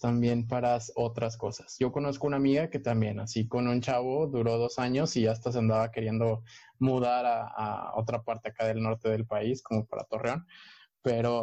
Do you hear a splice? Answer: no; 0 cuts

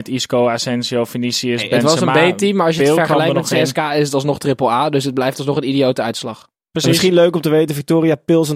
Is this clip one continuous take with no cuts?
yes; 0 cuts

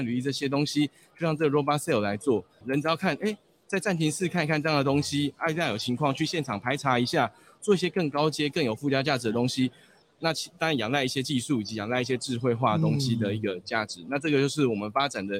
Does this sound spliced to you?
yes; 2 cuts; at 2.6 s, 10.0 s

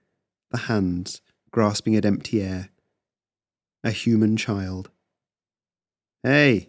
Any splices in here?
no; 0 cuts

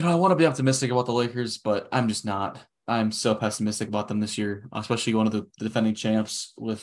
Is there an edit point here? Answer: no; 0 cuts

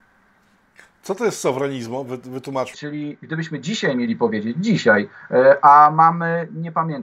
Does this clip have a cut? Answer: yes; 1 cut; at 2.7 s

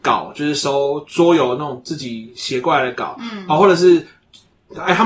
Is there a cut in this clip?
no; 0 cuts

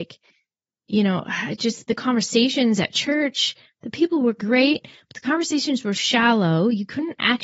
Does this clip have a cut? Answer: yes; 2 cuts; at 1.9 s, 6.0 s

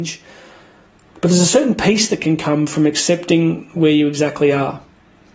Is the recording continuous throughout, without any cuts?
yes; 0 cuts

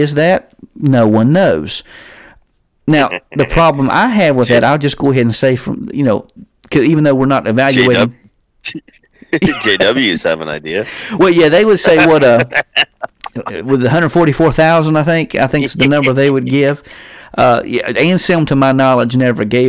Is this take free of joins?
yes; 0 cuts

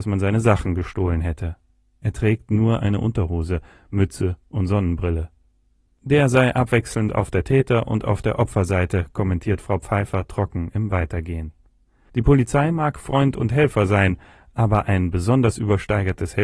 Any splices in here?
no; 0 cuts

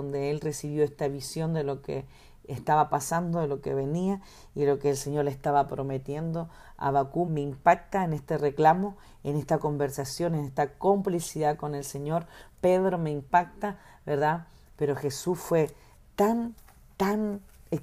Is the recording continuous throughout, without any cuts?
no; 2 cuts; at 7.2 s, 14.7 s

